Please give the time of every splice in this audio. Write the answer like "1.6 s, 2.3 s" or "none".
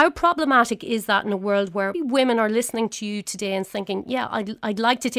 1.9 s